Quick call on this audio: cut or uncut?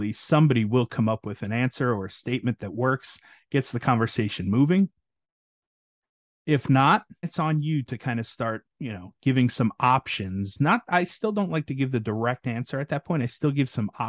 cut